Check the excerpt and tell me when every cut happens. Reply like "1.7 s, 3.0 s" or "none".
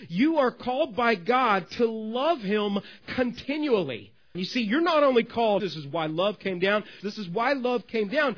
4.3 s, 5.6 s, 7.0 s

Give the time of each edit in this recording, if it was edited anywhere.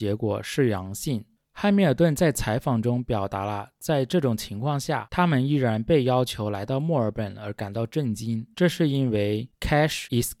1.4 s, 8.5 s

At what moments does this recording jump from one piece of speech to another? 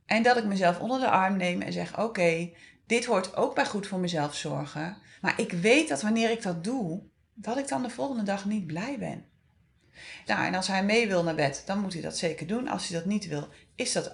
5.2 s, 10.3 s

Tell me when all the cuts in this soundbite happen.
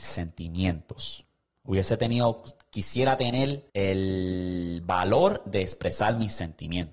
3.7 s

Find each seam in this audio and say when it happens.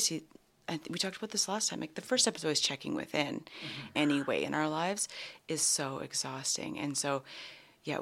4.0 s

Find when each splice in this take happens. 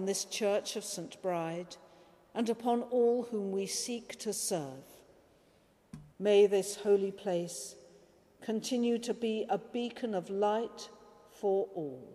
6.1 s

